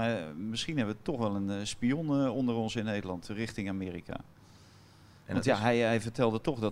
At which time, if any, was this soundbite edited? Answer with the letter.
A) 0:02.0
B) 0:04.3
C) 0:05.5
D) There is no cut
D